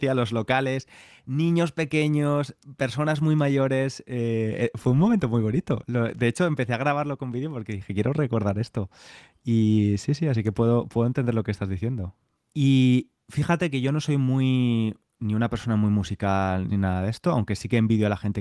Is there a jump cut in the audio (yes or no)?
yes